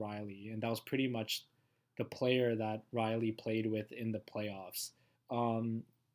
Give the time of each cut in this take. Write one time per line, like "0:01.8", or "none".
0:05.1